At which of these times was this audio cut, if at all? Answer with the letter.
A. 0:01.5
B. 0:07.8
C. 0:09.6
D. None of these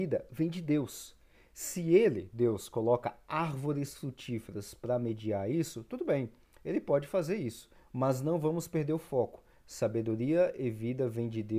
B